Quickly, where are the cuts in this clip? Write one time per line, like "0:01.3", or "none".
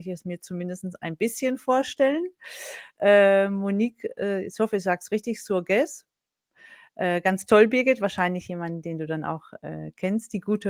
none